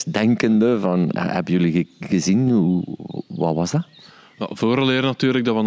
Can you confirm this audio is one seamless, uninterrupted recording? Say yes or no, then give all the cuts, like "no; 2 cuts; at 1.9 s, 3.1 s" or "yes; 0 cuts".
yes; 0 cuts